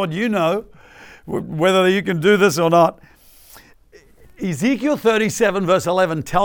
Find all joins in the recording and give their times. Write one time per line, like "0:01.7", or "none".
none